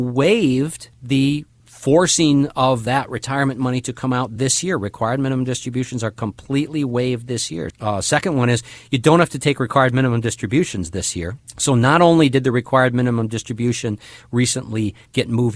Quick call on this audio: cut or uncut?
cut